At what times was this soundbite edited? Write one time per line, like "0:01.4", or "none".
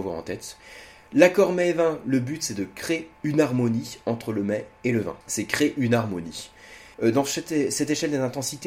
0:05.2
0:06.9